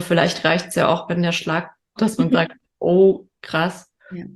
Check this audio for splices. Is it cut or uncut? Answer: cut